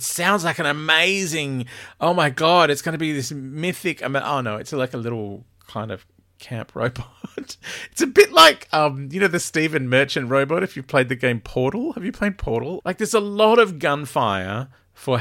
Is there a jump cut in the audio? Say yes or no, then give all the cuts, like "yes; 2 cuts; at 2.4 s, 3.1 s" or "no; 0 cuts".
yes; 1 cut; at 12.8 s